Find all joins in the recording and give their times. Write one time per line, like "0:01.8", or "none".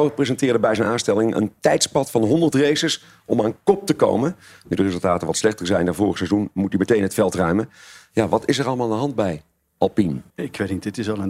0:10.3